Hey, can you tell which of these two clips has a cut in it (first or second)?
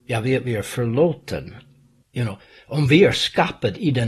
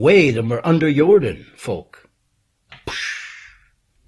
first